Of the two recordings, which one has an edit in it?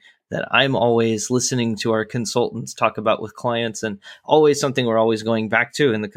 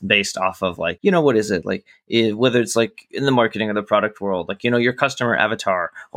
second; 1 cut; at 1.0 s

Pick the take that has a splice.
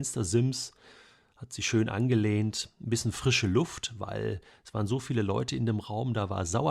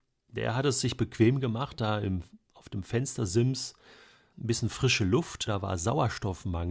second; 2 cuts; at 4.3 s, 5.5 s

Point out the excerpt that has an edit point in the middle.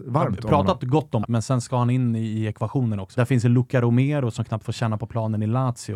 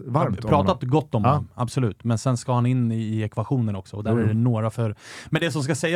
first; 2 cuts; at 1.2 s, 3.1 s

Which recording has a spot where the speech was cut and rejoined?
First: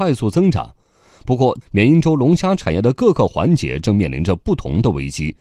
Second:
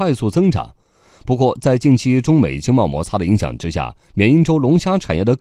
first; 1 cut; at 1.6 s

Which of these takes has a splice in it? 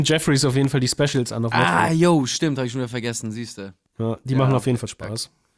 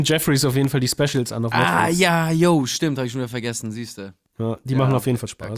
first; 1 cut; at 1.9 s

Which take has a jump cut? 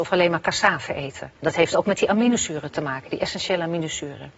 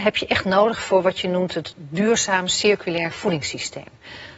first; 1 cut; at 1.4 s

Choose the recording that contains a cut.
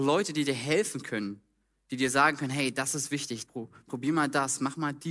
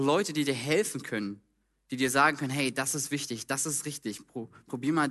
first; 1 cut; at 3.5 s

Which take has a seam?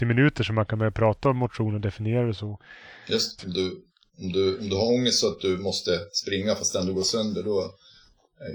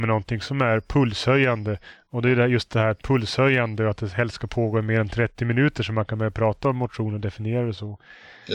first; 1 cut; at 3.4 s

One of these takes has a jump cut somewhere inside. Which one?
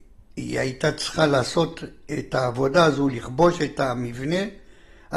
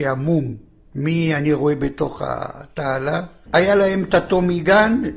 second; 1 cut; at 3.5 s

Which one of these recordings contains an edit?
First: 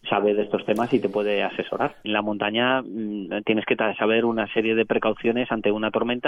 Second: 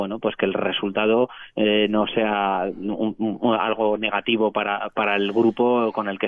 first; 1 cut; at 2.0 s

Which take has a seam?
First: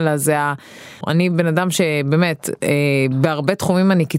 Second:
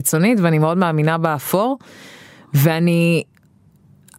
first; 1 cut; at 1.0 s

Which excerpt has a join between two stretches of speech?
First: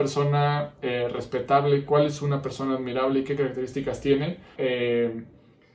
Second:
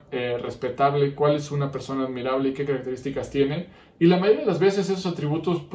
first; 1 cut; at 4.6 s

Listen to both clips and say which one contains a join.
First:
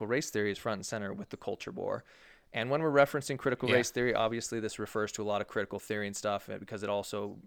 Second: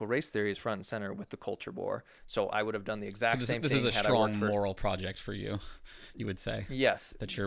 second; 1 cut; at 2.2 s

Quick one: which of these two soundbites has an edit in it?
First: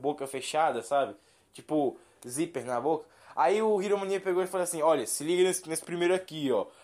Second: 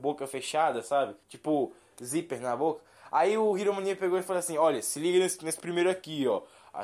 second; 1 cut; at 1.2 s

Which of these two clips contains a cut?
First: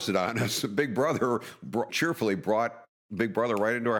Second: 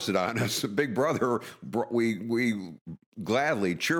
first; 1 cut; at 1.9 s

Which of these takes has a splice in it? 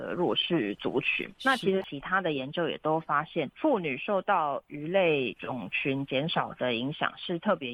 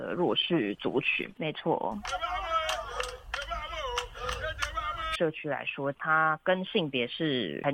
second; 2 cuts; at 1.4 s, 5.1 s

